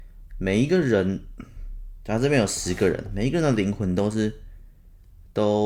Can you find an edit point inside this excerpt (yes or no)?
no